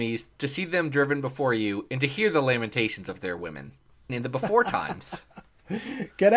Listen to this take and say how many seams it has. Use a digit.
1